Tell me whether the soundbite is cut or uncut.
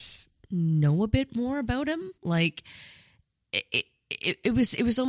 cut